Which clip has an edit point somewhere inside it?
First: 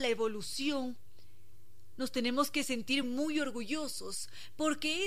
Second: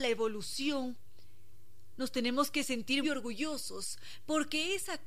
second; 1 cut; at 3.0 s

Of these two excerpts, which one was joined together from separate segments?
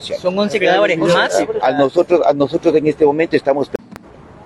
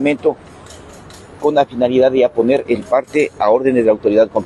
first; 1 cut; at 1.6 s

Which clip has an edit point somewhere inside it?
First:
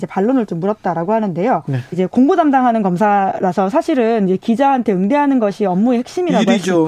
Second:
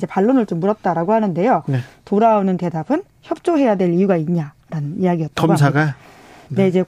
first; 1 cut; at 1.9 s

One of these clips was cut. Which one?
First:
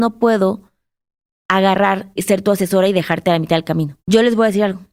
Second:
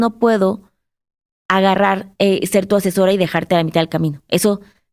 first; 2 cuts; at 2.2 s, 4.0 s

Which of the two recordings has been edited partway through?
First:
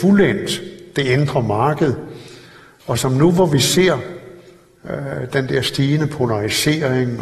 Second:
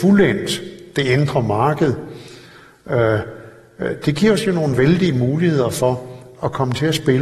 first; 1 cut; at 2.8 s

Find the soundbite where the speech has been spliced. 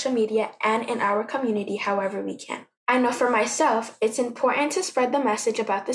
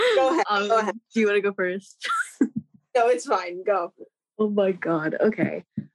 first; 1 cut; at 2.7 s

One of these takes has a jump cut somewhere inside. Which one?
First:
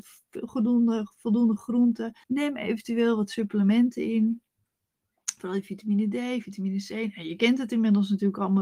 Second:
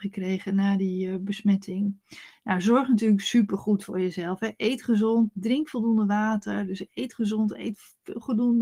first; 1 cut; at 2.2 s

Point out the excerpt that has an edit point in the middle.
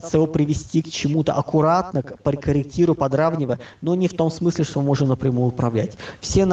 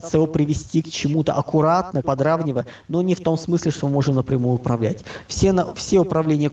second; 1 cut; at 2.0 s

